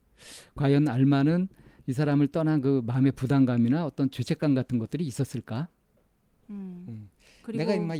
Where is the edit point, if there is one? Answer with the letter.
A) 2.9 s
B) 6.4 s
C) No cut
B